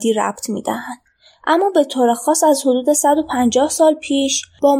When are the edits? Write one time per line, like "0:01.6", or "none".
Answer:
none